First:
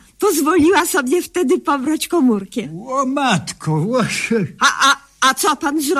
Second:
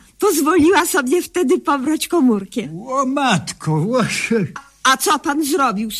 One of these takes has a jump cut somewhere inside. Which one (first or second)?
second